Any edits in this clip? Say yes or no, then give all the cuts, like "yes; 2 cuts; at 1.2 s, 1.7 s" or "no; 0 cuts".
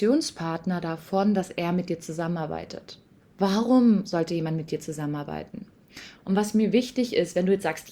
yes; 2 cuts; at 3.2 s, 6.1 s